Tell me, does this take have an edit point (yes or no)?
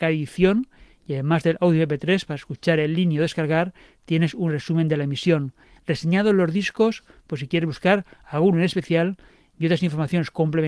no